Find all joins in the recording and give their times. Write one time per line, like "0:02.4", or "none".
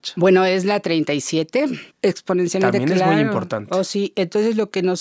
0:01.9